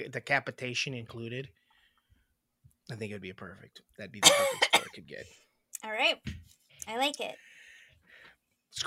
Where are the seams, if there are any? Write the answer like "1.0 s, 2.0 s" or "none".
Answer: none